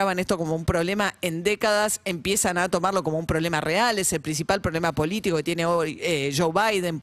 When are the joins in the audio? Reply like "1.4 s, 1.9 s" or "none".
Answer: none